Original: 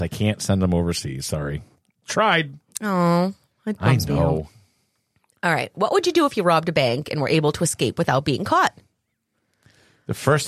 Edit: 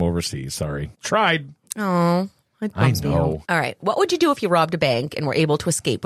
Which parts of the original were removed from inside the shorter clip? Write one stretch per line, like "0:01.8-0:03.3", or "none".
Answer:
0:01.7-0:02.0
0:04.5-0:05.4